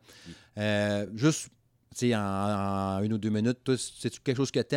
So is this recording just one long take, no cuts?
yes; 0 cuts

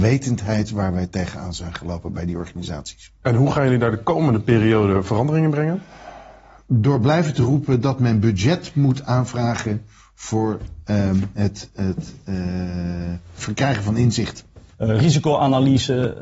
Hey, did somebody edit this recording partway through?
yes; 2 cuts; at 11.7 s, 14.7 s

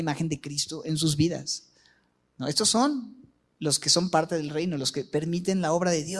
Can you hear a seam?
no; 0 cuts

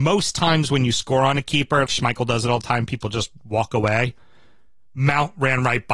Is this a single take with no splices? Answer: no; 1 cut; at 1.9 s

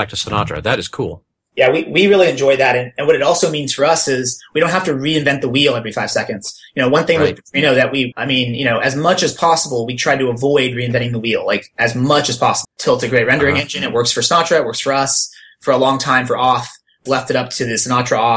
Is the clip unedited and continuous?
no; 3 cuts; at 8.1 s, 12.6 s, 17.1 s

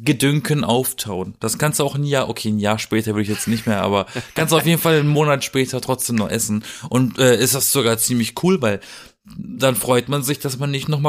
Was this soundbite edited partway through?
no; 0 cuts

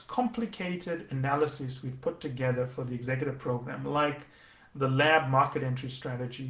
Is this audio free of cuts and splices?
yes; 0 cuts

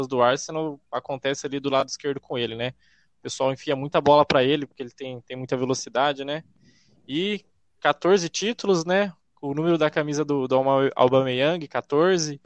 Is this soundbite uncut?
yes; 0 cuts

